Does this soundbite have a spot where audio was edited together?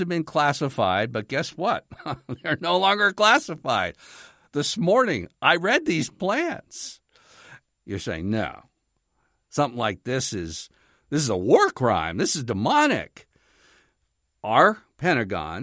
yes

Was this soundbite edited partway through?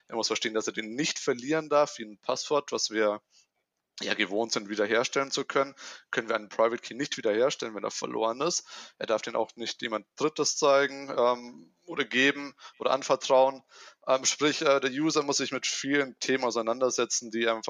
no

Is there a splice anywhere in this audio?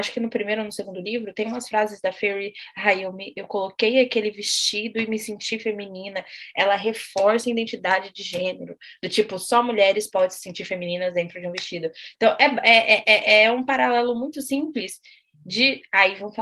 yes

